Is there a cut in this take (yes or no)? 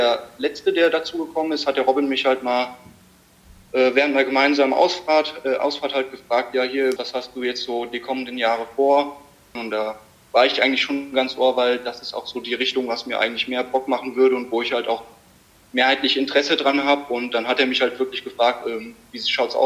yes